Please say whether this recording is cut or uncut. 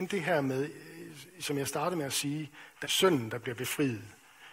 cut